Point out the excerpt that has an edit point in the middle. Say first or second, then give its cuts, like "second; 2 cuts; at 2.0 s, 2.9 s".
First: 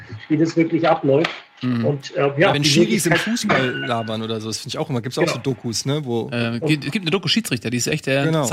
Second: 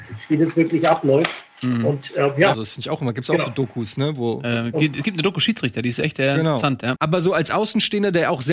second; 2 cuts; at 2.5 s, 7.0 s